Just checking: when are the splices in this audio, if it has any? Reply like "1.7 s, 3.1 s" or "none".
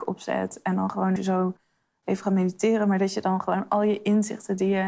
1.2 s